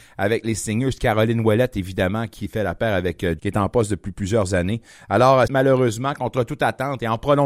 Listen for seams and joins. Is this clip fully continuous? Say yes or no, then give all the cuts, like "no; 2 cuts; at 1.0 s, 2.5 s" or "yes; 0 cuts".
no; 2 cuts; at 3.4 s, 5.5 s